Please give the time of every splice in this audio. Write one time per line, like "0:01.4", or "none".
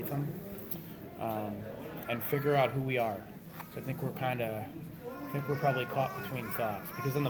0:02.0